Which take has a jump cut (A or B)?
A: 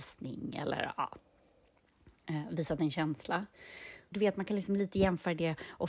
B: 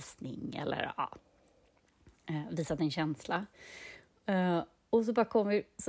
A